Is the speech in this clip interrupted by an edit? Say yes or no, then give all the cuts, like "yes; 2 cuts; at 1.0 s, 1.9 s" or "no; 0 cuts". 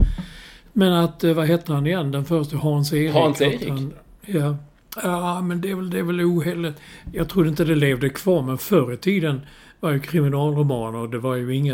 yes; 1 cut; at 5.0 s